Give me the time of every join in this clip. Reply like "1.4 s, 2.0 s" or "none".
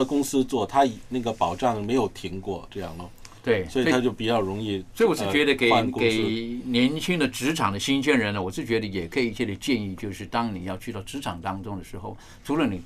none